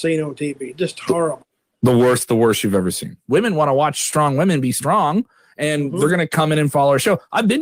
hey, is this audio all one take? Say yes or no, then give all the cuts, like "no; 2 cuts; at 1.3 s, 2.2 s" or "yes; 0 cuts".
no; 1 cut; at 3.3 s